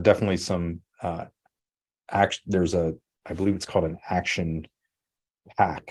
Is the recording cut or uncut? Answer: uncut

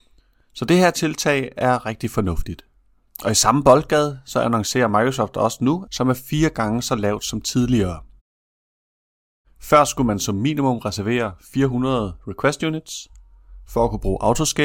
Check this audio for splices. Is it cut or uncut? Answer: cut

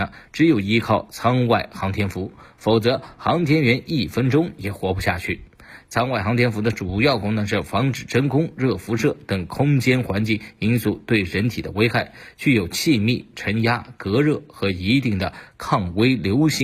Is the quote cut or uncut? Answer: uncut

